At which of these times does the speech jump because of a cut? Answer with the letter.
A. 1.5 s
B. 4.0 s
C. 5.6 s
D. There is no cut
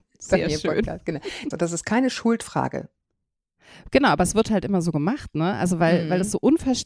A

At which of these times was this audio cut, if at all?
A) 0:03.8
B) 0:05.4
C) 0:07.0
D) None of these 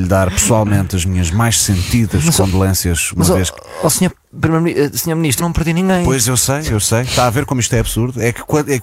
B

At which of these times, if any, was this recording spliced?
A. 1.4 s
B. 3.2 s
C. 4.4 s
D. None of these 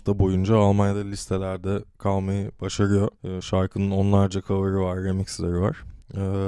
B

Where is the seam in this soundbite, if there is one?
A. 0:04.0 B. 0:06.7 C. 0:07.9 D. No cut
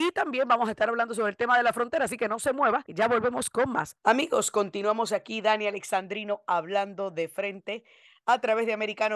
A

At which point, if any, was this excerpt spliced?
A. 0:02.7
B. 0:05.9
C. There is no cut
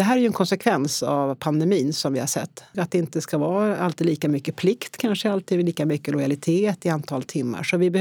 A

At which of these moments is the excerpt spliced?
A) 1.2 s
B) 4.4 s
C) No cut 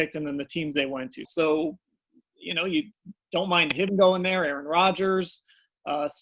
A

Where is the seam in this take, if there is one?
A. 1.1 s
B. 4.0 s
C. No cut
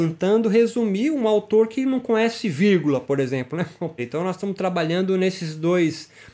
B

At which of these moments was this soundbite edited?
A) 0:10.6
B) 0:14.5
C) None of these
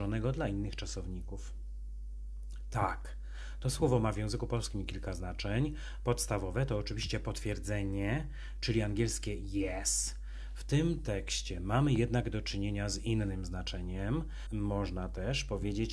B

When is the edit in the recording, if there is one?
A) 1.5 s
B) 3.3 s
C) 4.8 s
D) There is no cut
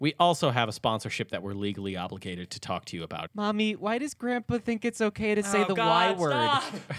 B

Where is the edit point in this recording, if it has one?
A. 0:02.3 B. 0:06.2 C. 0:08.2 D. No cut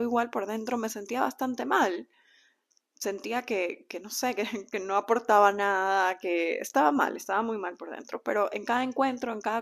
D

